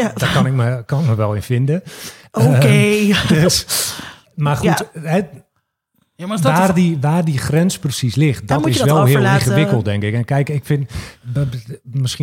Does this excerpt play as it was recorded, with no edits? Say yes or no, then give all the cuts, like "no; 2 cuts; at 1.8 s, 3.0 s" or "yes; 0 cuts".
yes; 0 cuts